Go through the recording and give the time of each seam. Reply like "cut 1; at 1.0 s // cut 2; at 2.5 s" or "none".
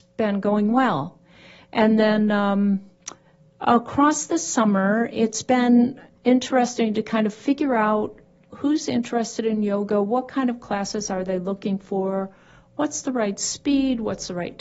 none

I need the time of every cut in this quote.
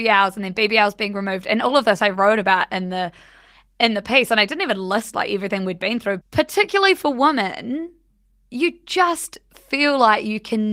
cut 1; at 6.2 s

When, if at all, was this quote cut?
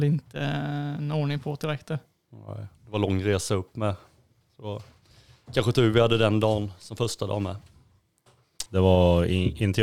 cut 1; at 8.7 s

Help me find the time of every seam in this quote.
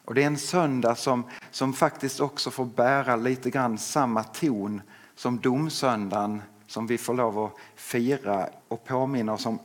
cut 1; at 8.6 s

